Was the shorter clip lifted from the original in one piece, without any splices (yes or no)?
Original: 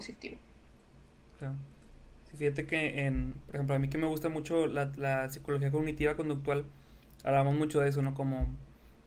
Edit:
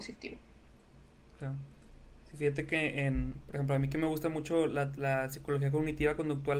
yes